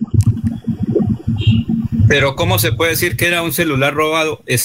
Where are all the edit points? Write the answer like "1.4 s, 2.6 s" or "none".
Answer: none